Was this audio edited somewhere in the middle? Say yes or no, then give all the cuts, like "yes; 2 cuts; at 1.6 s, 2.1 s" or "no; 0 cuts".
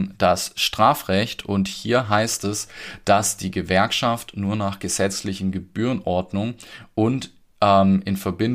no; 0 cuts